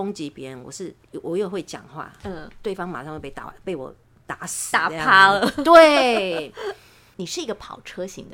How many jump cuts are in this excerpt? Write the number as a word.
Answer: zero